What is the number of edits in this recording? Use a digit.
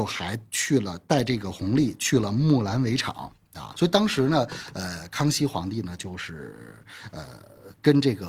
1